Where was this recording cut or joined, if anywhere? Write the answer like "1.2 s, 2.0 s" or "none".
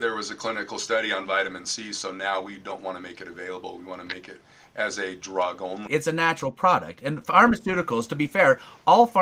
5.9 s